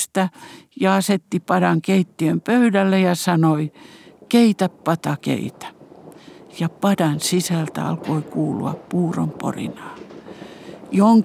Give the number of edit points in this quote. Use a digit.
0